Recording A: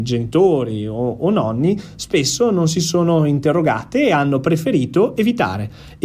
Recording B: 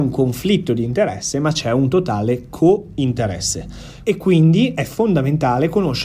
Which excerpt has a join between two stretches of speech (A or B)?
B